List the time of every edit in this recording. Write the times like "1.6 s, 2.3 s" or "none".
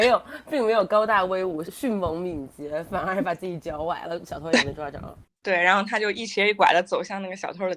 1.6 s